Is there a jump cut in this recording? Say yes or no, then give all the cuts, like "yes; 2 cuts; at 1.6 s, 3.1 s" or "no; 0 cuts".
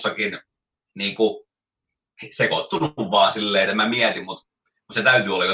yes; 1 cut; at 3.7 s